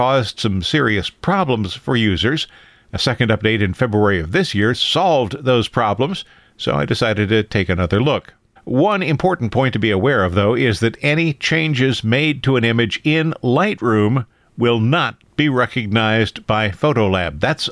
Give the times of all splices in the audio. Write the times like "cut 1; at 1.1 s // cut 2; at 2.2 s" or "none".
cut 1; at 8.6 s